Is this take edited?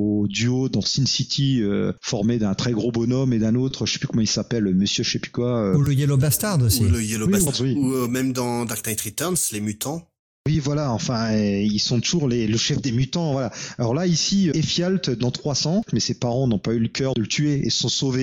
yes; 3 cuts; at 7.5 s, 14.5 s, 15.9 s

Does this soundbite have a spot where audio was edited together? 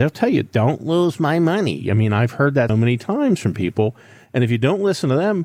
yes; 1 cut; at 2.7 s

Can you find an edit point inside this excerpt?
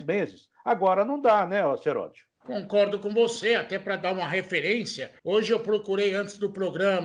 yes; 2 cuts; at 2.3 s, 5.2 s

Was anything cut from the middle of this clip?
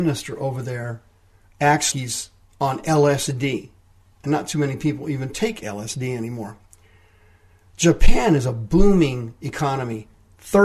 yes; 1 cut; at 1.9 s

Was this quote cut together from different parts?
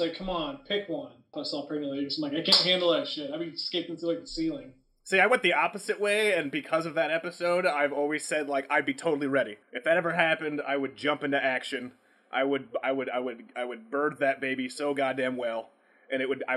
yes; 2 cuts; at 1.3 s, 9.6 s

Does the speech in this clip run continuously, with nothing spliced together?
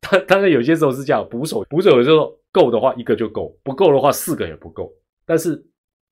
no; 1 cut; at 1.6 s

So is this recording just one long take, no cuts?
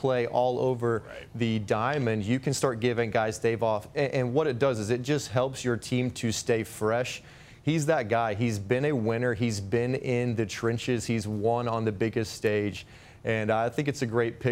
yes; 0 cuts

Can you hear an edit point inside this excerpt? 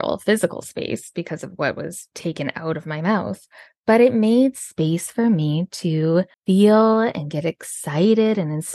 yes; 2 cuts; at 2.1 s, 6.3 s

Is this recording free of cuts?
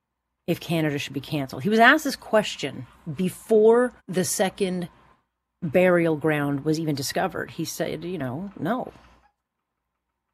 no; 1 cut; at 4.0 s

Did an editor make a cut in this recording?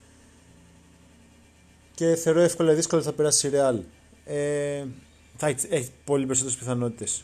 no; 0 cuts

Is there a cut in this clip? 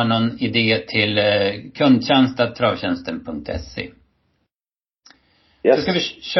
no; 0 cuts

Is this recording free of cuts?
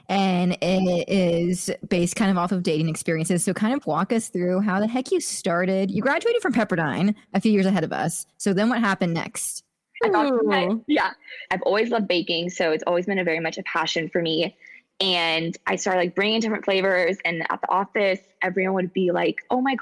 no; 2 cuts; at 10.0 s, 11.5 s

